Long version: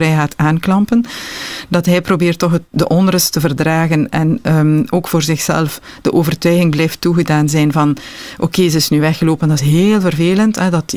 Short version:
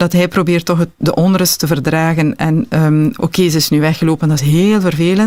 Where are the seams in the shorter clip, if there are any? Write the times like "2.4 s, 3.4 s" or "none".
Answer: 3.2 s